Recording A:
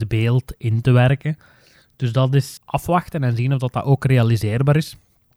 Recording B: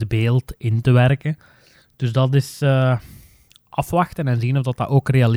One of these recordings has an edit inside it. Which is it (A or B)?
A